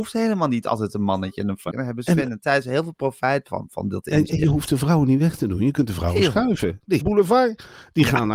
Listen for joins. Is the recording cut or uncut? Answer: cut